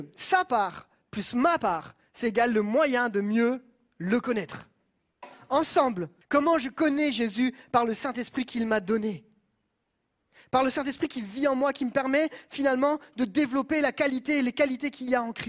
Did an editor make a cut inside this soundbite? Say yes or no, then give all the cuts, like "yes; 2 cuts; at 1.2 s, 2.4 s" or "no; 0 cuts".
yes; 1 cut; at 6.2 s